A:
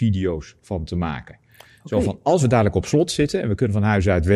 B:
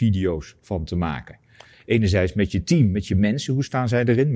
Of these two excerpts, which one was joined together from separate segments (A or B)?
B